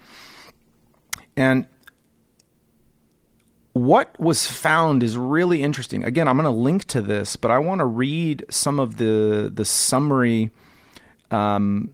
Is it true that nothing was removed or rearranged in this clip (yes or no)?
no